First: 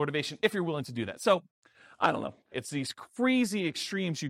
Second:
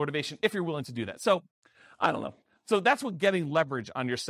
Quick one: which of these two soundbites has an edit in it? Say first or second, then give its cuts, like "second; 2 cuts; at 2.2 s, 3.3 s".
first; 1 cut; at 2.5 s